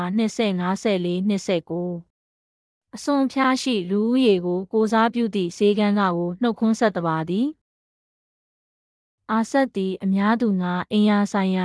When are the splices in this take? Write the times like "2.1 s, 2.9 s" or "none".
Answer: none